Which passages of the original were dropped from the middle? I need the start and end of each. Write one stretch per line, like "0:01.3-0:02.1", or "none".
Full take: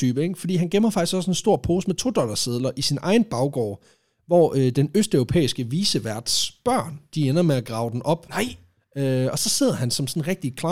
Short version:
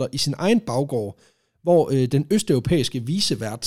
none